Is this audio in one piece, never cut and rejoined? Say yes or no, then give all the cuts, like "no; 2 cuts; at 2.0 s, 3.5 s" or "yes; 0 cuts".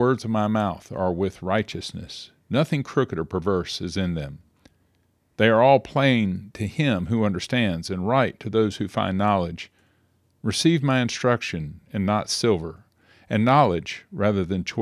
yes; 0 cuts